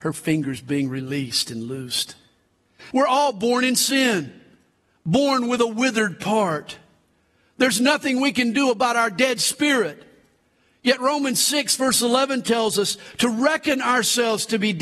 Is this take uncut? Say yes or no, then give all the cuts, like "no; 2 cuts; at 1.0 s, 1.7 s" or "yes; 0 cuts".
no; 1 cut; at 2.9 s